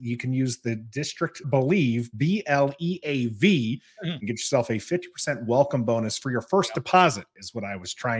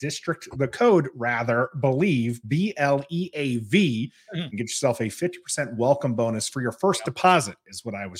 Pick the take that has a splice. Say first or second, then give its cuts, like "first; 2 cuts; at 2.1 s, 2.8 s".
first; 1 cut; at 1.4 s